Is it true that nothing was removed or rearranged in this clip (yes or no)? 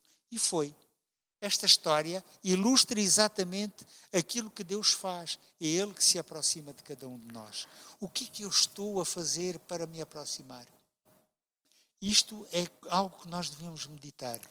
yes